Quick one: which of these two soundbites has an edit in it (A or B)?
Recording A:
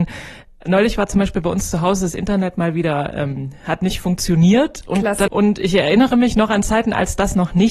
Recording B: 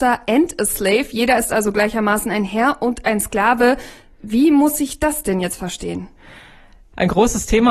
A